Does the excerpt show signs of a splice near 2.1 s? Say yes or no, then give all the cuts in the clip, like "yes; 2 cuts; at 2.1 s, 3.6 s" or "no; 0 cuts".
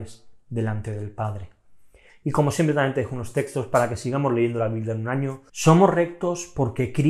yes; 2 cuts; at 2.1 s, 5.5 s